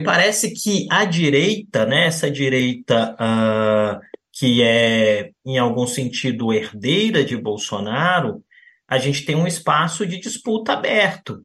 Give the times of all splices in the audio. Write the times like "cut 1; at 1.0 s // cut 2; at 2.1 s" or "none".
none